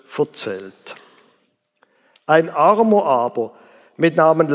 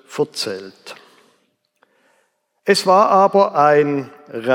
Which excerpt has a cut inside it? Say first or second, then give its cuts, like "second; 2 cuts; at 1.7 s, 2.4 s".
first; 1 cut; at 2.1 s